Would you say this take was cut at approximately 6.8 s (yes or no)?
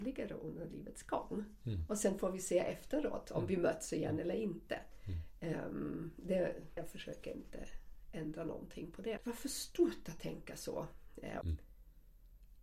yes